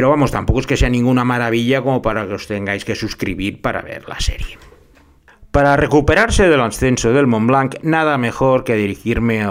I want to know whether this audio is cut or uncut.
uncut